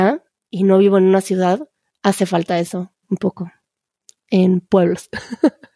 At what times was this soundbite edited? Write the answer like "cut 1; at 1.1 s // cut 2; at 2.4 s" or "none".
none